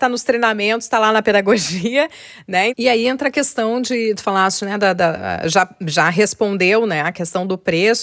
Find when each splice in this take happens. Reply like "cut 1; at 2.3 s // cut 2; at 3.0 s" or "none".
cut 1; at 2.7 s